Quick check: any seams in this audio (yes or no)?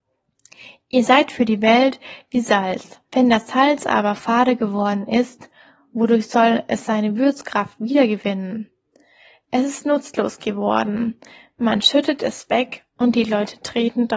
yes